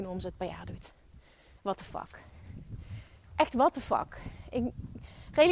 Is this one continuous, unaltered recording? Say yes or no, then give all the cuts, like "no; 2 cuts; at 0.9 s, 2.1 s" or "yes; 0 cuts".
yes; 0 cuts